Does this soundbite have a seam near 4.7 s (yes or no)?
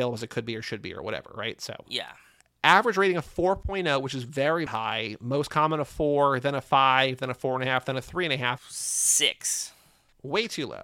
yes